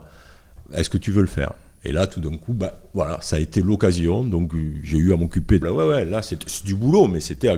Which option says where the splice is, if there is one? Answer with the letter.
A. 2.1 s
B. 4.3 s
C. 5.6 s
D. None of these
C